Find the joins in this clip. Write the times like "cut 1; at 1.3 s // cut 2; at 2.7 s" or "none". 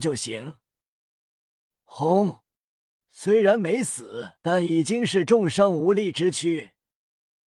cut 1; at 3.0 s // cut 2; at 4.4 s